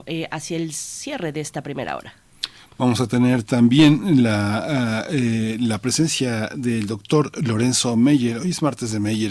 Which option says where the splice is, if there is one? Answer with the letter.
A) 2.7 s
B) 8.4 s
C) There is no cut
C